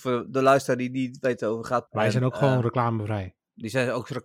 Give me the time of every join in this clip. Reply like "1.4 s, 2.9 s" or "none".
1.9 s